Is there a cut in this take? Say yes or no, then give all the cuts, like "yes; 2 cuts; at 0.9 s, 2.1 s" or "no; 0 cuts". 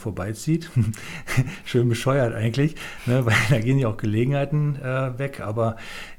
no; 0 cuts